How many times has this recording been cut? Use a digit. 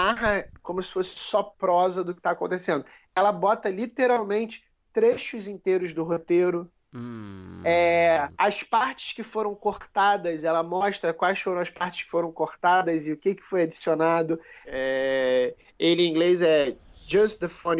2